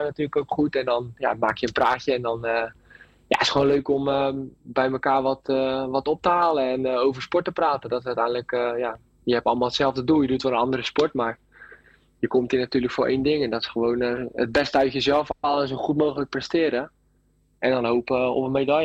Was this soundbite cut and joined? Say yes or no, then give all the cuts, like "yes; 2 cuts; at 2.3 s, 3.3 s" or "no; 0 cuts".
no; 0 cuts